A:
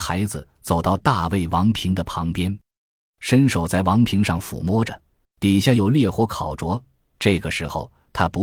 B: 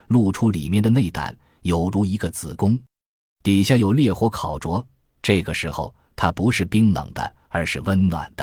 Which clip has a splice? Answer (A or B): A